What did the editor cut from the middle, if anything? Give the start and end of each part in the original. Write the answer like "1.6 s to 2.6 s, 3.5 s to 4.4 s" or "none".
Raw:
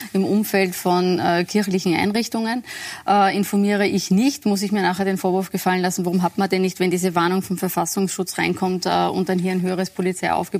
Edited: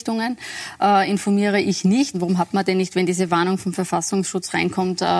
4.4 s to 6.0 s